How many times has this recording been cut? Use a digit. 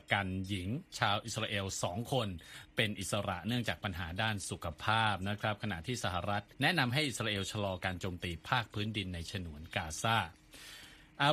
1